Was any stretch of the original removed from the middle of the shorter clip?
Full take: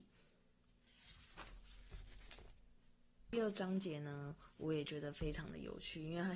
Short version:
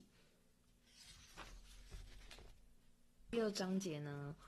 no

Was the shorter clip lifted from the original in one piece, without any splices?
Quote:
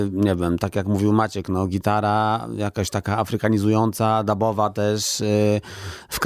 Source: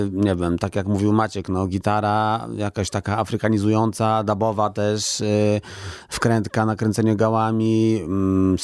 yes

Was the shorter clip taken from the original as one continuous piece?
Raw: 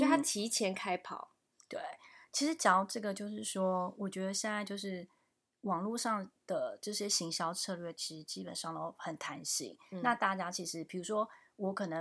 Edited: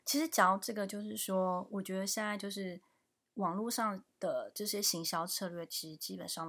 yes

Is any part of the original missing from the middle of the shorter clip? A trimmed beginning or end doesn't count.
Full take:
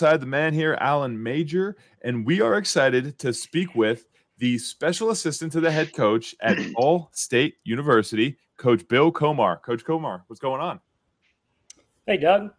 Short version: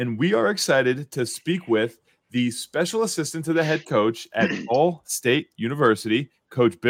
no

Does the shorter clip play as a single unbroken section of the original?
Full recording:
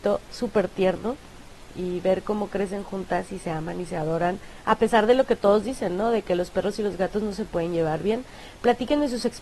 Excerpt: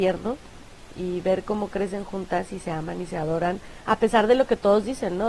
yes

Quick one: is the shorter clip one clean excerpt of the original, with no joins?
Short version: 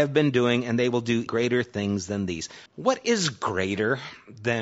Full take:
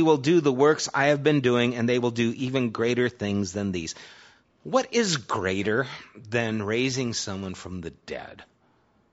no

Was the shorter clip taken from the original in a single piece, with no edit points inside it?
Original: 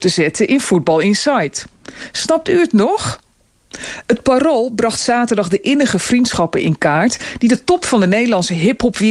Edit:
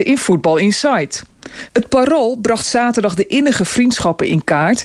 no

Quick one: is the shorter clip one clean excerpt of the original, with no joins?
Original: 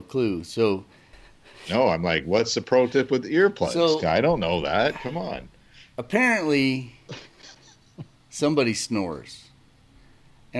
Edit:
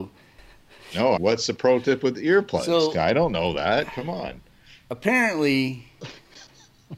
no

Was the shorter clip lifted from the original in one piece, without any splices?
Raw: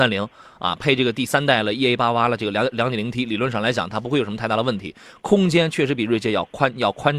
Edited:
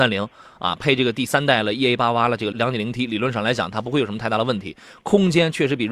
no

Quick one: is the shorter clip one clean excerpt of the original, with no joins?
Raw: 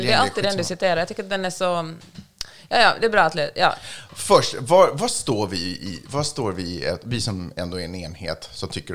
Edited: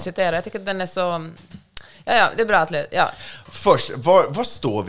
yes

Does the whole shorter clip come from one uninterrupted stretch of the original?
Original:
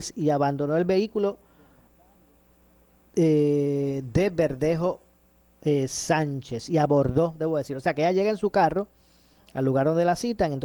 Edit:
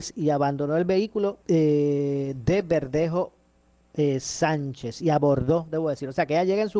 no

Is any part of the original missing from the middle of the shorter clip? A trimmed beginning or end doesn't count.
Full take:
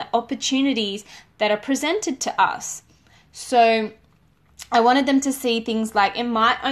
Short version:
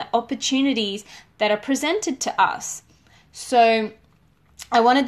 no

